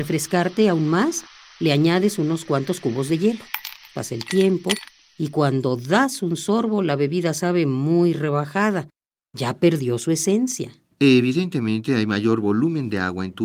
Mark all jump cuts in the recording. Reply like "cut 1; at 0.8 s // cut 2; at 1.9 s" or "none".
none